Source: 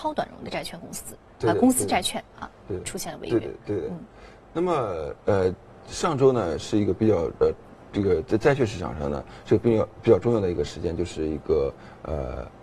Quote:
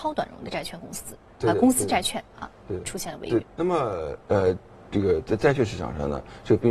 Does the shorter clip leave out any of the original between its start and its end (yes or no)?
yes